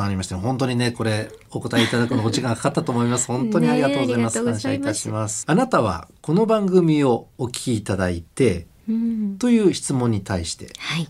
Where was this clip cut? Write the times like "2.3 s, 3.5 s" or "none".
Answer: 5.4 s, 8.8 s